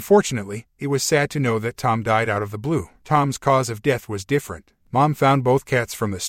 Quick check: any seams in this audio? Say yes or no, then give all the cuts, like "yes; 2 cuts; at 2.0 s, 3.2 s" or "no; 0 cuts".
yes; 2 cuts; at 3.0 s, 4.9 s